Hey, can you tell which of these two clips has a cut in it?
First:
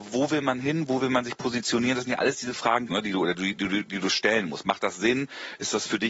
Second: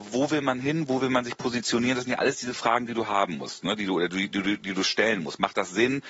first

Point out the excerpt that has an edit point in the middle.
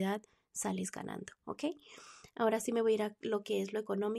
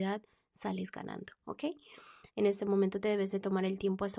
second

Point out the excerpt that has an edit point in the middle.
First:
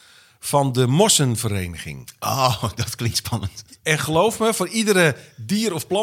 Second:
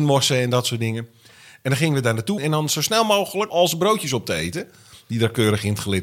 second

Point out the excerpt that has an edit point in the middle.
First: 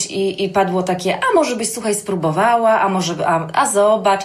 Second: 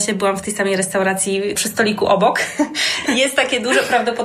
second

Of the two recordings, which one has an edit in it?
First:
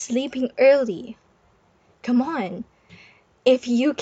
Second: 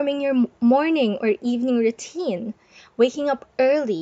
first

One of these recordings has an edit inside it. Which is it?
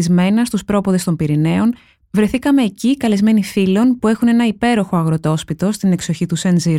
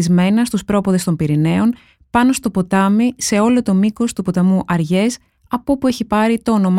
first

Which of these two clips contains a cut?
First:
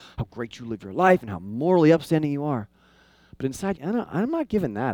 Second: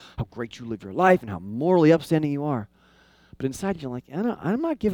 first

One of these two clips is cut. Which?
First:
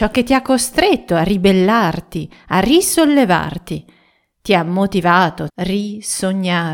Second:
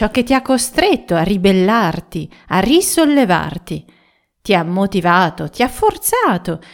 first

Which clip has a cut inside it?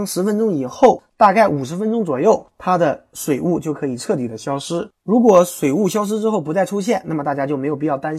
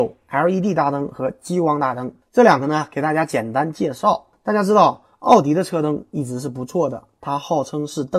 first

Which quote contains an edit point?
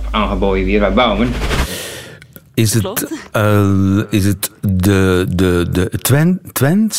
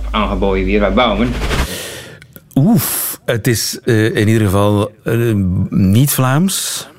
first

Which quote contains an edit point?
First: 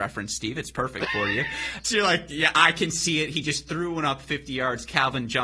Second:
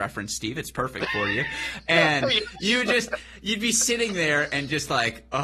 first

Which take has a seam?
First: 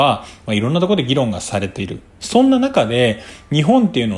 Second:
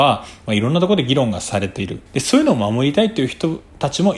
second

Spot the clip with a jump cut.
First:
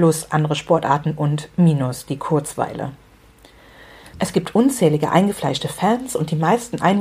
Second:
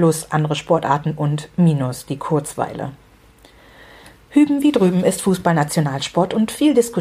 first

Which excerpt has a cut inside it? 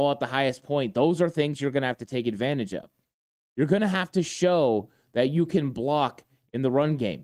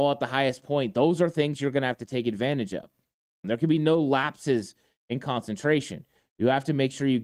second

